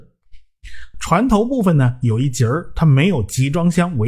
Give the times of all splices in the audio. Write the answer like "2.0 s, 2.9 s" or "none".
0.9 s